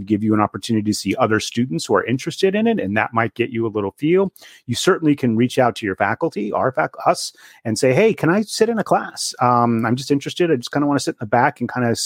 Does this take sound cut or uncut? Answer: uncut